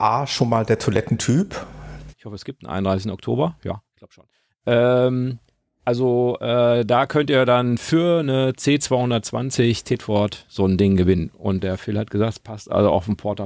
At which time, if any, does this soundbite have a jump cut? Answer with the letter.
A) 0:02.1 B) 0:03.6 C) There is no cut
A